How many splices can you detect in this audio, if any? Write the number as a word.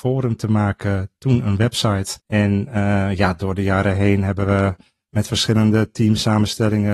one